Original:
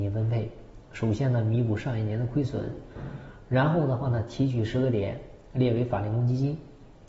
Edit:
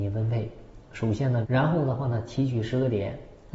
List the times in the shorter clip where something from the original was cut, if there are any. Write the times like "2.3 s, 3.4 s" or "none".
1.4 s